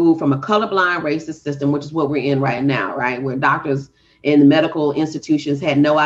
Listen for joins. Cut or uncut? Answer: uncut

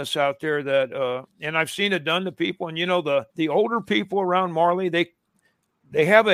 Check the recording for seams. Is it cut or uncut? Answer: cut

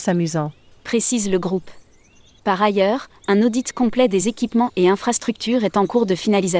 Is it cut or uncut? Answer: cut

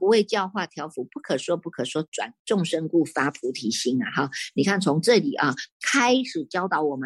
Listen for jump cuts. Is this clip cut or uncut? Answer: uncut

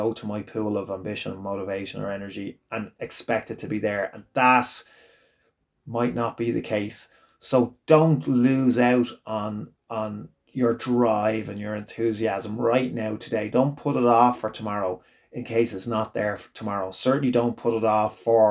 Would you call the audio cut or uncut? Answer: uncut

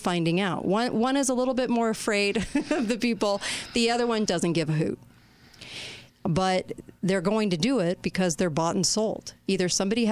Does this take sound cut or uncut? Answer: cut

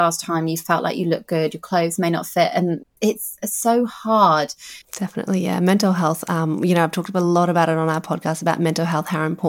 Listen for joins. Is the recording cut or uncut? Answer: cut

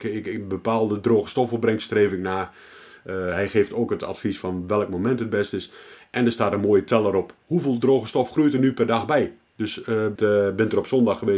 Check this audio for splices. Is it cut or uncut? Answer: cut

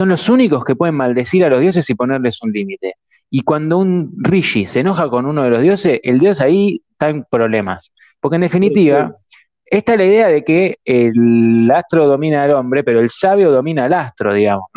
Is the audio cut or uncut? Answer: uncut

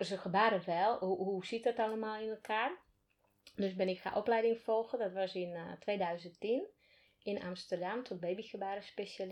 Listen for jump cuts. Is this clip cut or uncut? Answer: uncut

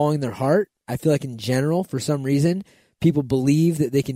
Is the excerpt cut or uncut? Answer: uncut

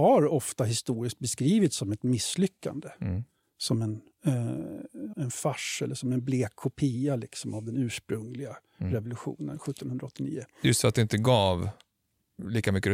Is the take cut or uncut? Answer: cut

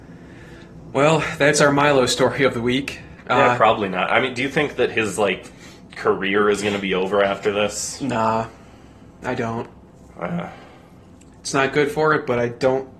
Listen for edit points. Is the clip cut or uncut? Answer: cut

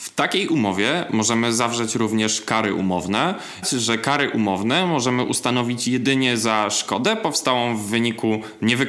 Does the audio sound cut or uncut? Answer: cut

